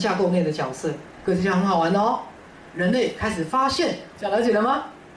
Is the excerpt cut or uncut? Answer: cut